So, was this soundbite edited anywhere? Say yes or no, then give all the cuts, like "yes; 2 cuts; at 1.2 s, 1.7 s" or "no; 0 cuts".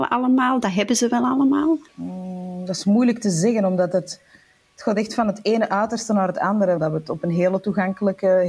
yes; 2 cuts; at 1.9 s, 6.8 s